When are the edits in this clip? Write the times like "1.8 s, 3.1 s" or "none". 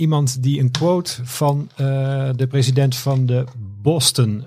none